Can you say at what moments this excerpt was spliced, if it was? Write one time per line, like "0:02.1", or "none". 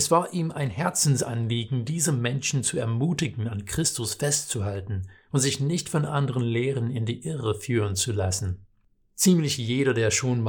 none